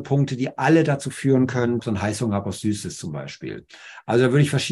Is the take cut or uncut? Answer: cut